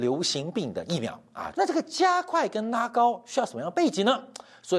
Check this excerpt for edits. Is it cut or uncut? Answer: cut